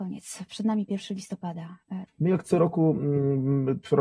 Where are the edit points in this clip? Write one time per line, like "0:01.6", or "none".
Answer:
0:02.1